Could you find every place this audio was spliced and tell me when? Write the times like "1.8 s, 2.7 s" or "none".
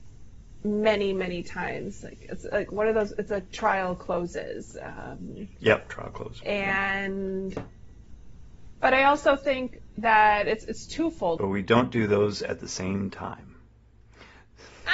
8.8 s, 11.4 s